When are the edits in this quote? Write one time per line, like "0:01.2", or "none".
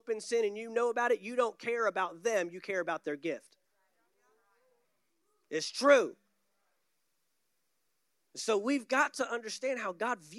none